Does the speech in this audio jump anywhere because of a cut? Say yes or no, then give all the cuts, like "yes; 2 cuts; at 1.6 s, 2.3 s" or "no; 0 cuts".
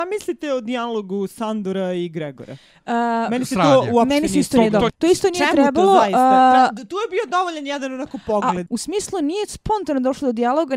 yes; 2 cuts; at 4.9 s, 8.7 s